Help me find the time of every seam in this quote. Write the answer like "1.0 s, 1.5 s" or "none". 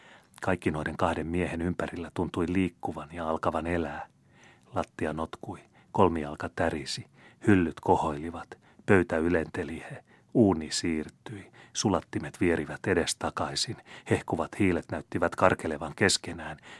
none